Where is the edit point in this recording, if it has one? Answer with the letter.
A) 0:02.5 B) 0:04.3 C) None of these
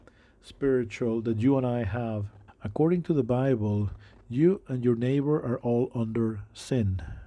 A